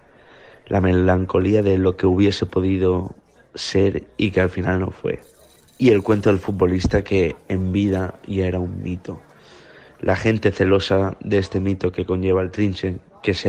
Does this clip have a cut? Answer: no; 0 cuts

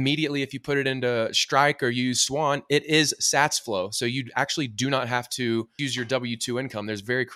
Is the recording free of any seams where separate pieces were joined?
no; 1 cut; at 5.8 s

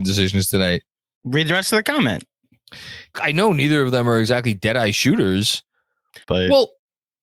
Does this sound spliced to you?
yes; 2 cuts; at 3.1 s, 6.2 s

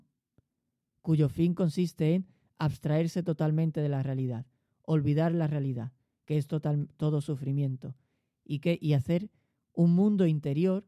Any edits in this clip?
no; 0 cuts

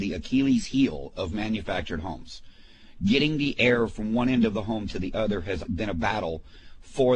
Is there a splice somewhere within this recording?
yes; 1 cut; at 5.6 s

